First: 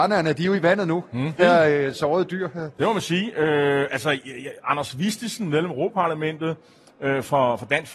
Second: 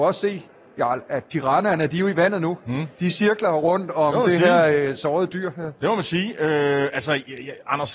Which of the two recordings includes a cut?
first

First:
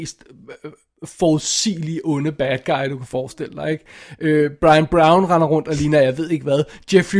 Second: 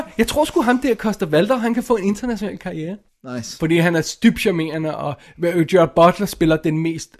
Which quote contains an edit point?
second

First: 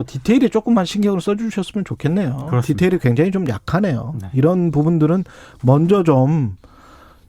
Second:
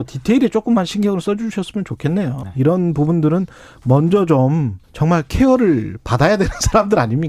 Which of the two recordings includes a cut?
second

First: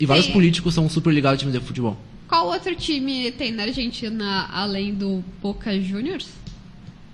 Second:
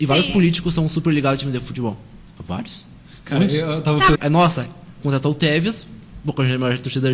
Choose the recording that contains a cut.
second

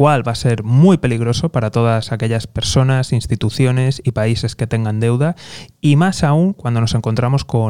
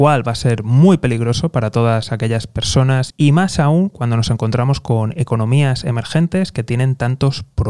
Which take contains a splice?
second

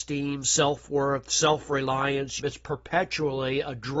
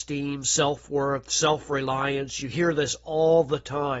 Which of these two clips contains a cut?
first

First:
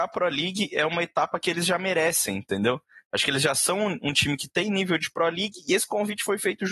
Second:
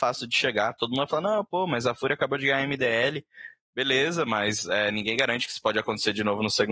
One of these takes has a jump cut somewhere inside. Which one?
first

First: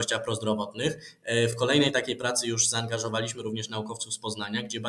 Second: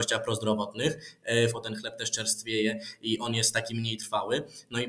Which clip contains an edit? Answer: second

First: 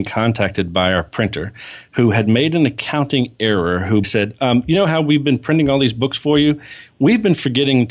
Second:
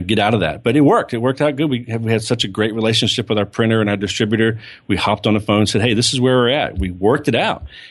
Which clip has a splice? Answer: first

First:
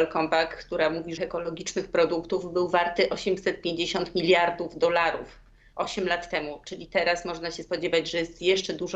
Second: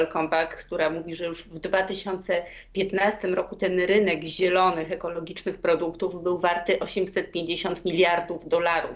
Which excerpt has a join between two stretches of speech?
first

